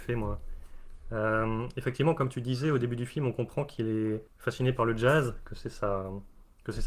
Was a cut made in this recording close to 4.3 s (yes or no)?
yes